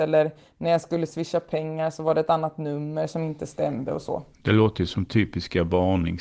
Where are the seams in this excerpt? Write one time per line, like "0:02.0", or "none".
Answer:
none